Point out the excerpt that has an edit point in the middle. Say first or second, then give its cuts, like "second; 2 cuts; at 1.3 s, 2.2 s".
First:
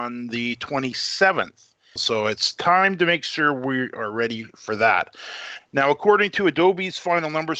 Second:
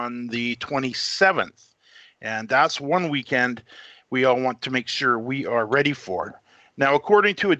first; 2 cuts; at 2.0 s, 5.6 s